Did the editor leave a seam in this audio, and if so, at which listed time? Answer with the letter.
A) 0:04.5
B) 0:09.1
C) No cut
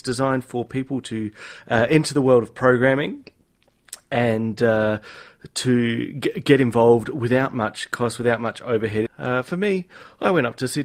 B